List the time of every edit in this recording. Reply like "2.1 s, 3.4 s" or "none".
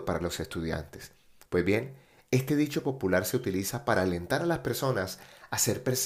1.5 s